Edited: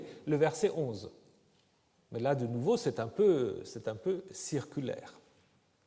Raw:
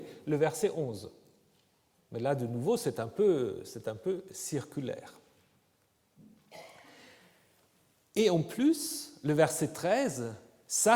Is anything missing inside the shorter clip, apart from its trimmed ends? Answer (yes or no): no